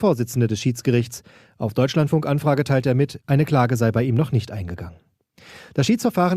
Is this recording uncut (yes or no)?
no